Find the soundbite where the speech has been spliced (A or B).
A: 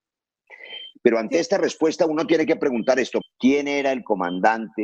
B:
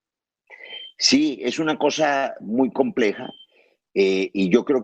A